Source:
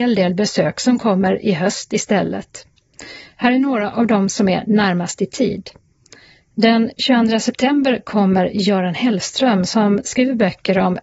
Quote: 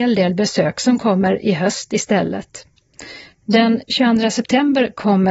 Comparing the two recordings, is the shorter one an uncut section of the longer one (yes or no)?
no